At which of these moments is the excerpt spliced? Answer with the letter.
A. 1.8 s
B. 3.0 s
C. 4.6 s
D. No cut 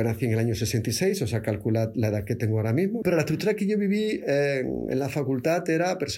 B